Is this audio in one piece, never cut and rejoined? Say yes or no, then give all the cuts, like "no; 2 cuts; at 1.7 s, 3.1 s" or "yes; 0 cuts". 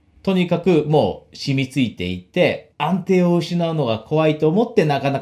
no; 1 cut; at 2.7 s